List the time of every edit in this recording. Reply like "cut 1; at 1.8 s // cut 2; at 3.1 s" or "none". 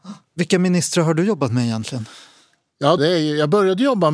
cut 1; at 3.0 s